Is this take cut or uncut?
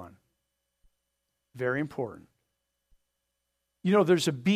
cut